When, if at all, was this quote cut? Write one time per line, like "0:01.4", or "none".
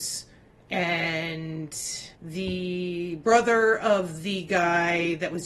0:02.1